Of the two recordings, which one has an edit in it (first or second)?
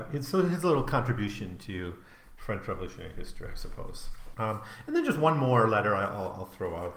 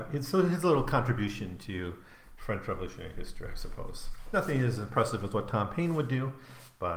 first